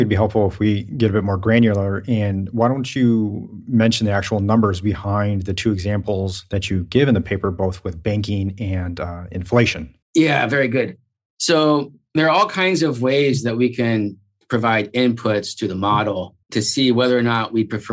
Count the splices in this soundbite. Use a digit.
2